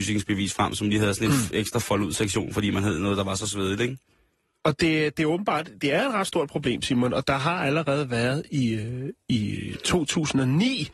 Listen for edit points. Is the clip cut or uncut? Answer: cut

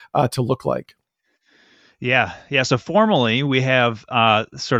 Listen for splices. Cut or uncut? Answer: uncut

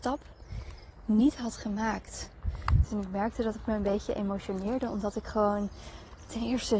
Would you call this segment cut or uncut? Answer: cut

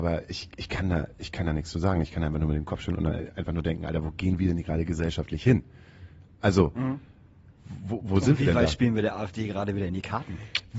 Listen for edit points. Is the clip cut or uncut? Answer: uncut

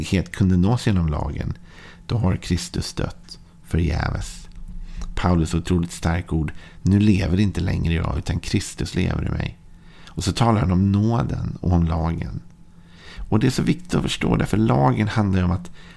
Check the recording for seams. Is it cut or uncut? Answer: uncut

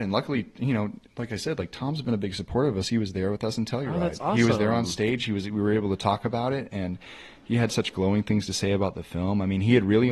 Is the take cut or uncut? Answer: uncut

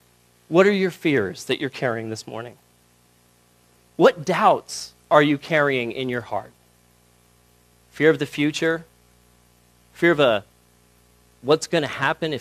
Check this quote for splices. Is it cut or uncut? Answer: cut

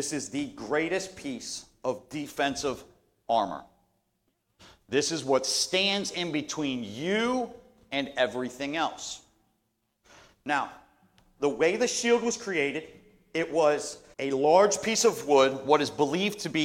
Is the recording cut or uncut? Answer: cut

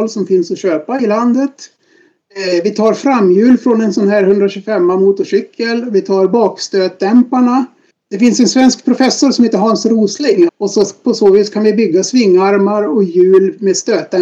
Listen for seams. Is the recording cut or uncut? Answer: cut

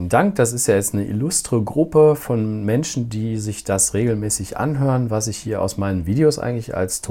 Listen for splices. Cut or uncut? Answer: uncut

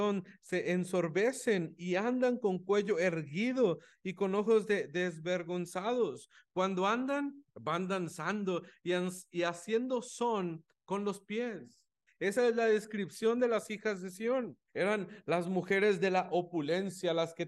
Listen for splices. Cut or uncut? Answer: cut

